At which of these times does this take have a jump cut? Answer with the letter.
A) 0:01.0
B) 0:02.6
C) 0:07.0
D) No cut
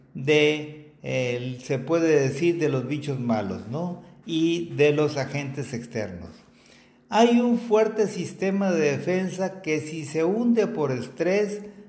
D